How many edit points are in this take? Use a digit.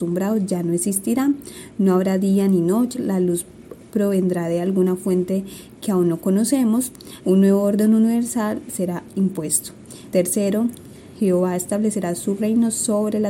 3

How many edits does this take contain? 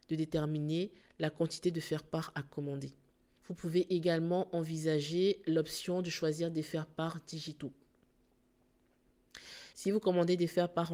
2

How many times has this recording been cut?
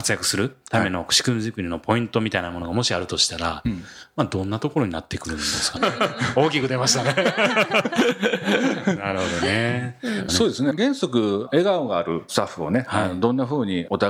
2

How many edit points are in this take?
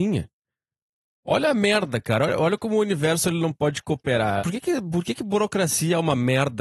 1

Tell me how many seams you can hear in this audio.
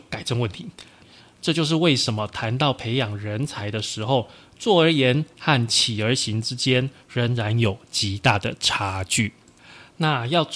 1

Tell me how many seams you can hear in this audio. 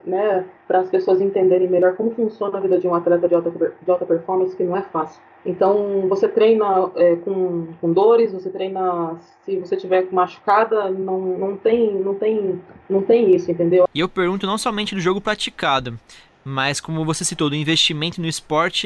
1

